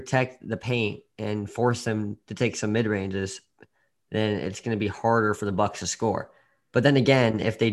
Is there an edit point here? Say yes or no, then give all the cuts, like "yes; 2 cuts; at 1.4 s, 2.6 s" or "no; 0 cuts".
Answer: no; 0 cuts